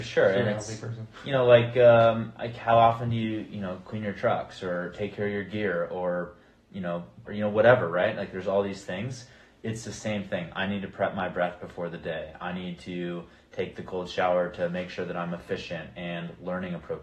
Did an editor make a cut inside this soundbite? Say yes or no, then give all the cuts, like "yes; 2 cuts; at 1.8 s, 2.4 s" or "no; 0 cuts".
yes; 1 cut; at 7.2 s